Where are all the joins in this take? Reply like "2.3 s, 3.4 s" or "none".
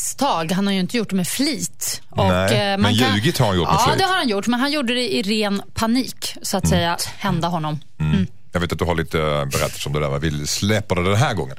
7.0 s